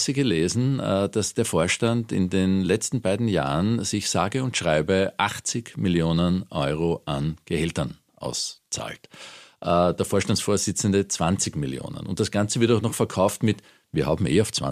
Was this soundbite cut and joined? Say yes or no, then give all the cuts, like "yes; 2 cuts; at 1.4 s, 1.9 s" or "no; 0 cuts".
no; 0 cuts